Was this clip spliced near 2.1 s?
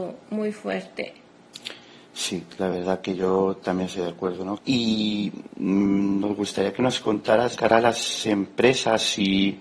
no; 2 cuts; at 4.6 s, 7.6 s

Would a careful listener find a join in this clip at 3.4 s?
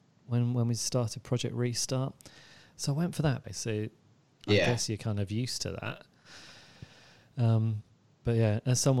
yes; 1 cut; at 3.4 s

